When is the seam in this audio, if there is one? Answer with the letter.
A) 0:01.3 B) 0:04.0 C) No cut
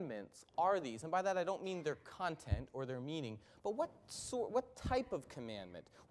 C